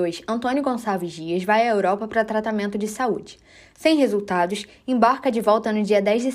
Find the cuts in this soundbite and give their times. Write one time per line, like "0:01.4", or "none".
none